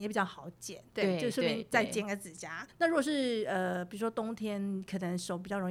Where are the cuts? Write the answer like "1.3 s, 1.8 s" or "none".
2.7 s